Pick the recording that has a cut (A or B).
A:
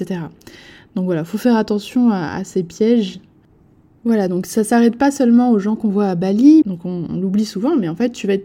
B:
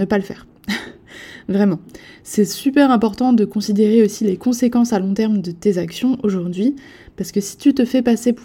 A